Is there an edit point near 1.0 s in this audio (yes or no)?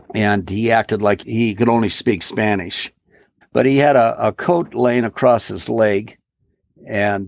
no